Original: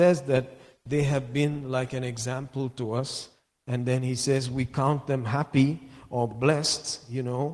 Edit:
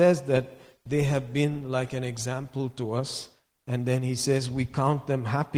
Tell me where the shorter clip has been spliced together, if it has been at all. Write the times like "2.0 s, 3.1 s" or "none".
none